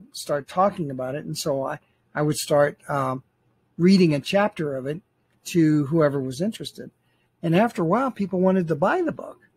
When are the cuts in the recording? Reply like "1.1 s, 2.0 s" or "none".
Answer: none